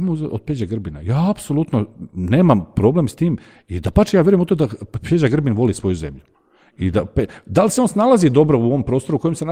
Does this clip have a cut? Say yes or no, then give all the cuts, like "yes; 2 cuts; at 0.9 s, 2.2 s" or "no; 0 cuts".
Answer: no; 0 cuts